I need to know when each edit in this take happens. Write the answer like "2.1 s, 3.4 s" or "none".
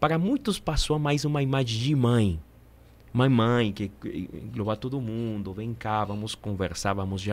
none